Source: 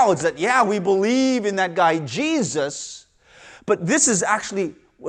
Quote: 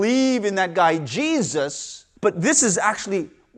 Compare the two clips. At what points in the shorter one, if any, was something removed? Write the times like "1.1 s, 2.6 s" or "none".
2.2 s